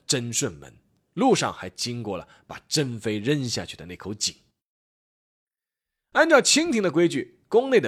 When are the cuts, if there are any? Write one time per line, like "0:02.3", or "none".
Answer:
none

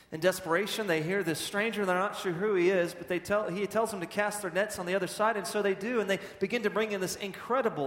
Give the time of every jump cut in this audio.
none

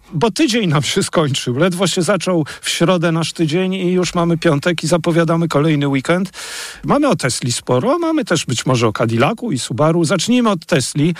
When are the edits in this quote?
0:06.8

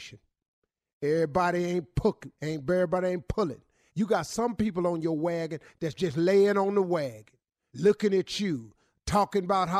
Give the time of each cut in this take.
0:03.9
0:07.7

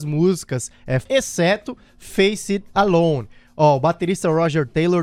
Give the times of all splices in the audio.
0:01.0

